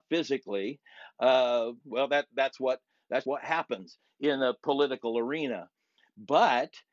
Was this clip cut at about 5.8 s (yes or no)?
no